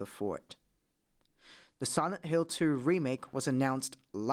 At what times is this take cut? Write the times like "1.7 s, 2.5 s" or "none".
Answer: none